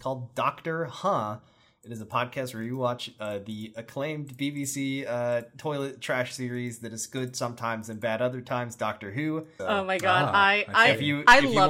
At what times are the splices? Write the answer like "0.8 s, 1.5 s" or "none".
9.6 s